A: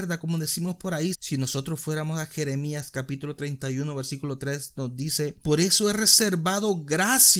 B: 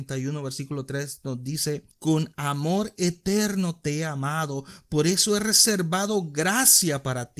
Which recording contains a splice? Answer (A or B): A